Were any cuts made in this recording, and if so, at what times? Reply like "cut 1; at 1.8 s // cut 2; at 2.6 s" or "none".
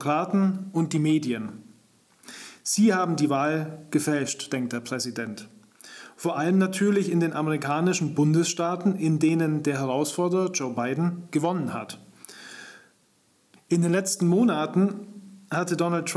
cut 1; at 13.6 s